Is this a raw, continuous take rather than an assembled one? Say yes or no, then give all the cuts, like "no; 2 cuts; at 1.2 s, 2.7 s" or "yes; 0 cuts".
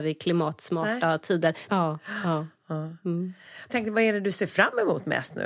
no; 2 cuts; at 1.7 s, 3.7 s